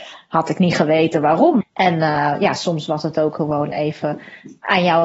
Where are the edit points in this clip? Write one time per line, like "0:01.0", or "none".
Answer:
0:01.6

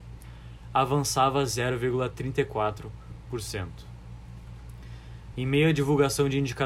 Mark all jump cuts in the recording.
0:05.3

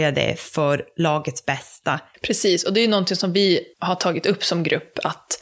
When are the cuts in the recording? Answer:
0:02.1

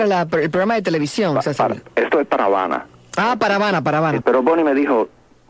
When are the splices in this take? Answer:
0:04.2

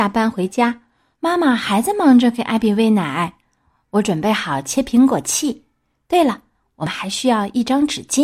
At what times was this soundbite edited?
0:01.1

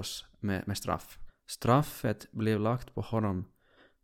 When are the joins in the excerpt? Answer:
0:01.3

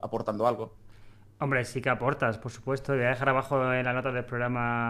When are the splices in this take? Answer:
none

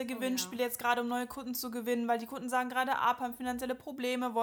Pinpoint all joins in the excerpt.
none

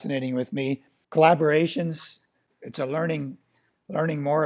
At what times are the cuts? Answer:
0:01.0

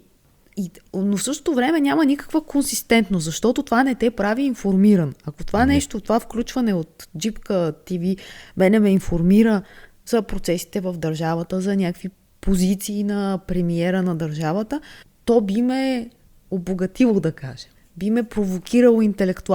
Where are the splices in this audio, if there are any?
none

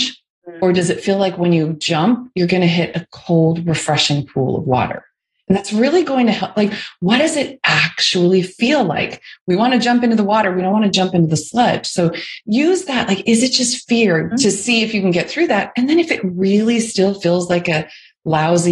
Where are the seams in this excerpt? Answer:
0:14.3

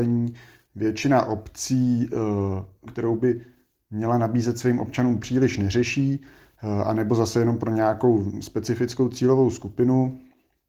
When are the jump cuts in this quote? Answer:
0:02.9

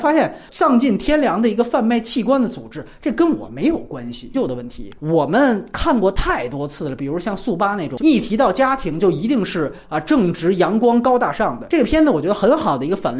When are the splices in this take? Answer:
0:04.3
0:08.0

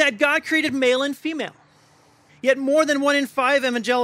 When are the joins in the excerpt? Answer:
0:02.3

